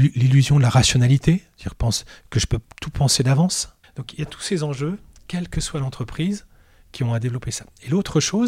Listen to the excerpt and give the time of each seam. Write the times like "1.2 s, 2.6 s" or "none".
3.8 s